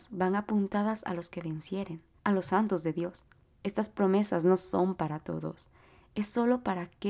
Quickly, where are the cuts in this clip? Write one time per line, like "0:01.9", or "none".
0:02.2